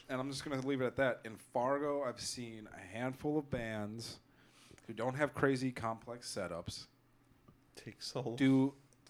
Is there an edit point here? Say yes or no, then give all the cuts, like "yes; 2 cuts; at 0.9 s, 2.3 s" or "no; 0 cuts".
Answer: no; 0 cuts